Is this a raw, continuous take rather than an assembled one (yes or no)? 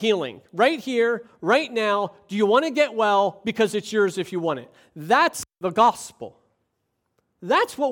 yes